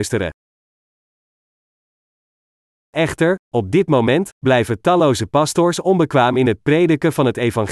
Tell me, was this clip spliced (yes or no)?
yes